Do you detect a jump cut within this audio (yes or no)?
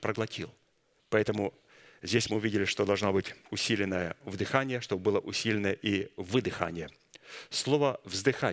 yes